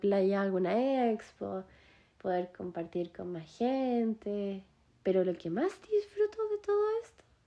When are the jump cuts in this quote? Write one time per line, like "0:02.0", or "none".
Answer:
0:04.9